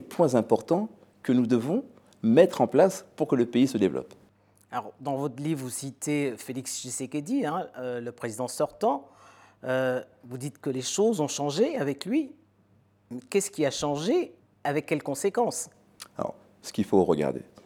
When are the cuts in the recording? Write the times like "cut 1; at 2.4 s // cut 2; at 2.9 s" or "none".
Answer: none